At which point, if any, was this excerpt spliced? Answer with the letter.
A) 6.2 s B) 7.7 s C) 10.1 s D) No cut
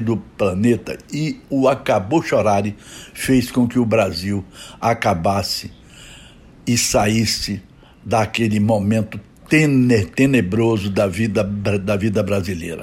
D